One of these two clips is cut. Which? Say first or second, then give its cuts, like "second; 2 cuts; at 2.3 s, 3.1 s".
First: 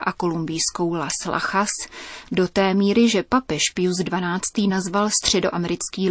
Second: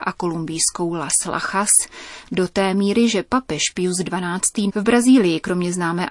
second; 1 cut; at 4.7 s